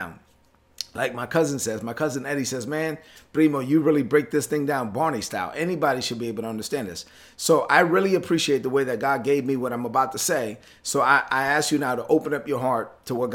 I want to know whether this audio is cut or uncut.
uncut